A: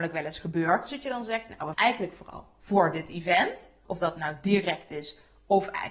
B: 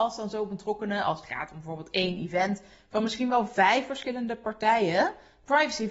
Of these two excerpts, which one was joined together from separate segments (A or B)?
A